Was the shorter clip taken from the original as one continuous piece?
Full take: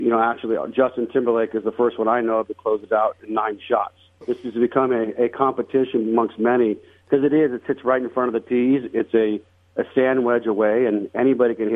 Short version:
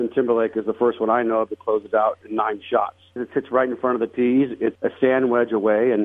no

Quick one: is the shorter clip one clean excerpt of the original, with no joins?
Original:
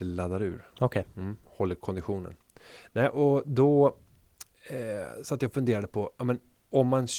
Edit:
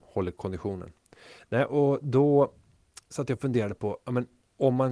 no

